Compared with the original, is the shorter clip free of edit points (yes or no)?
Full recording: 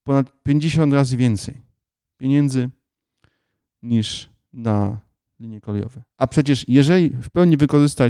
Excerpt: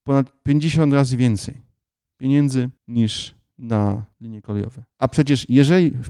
no